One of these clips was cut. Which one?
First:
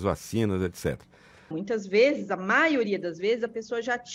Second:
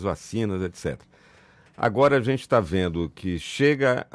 first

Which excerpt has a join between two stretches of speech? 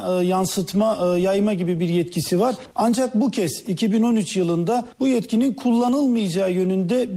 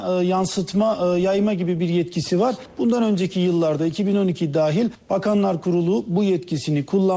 first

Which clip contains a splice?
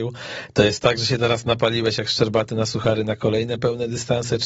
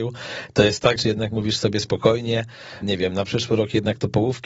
second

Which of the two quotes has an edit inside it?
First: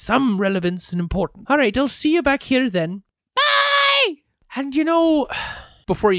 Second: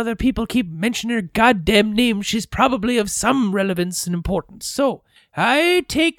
first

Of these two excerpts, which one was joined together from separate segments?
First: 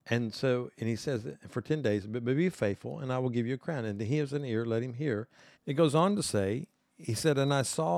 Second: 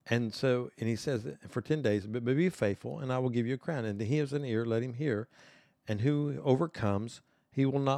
first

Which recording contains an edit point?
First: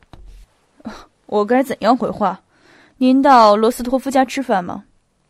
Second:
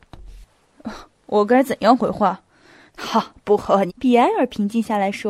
second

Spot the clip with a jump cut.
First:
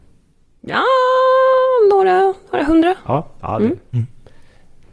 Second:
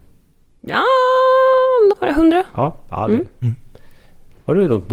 second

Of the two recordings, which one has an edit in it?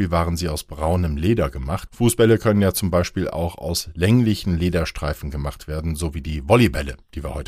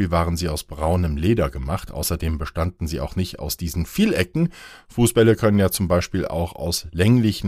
first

